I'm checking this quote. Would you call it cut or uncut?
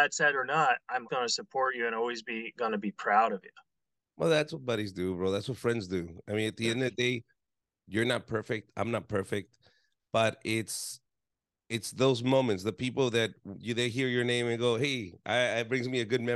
cut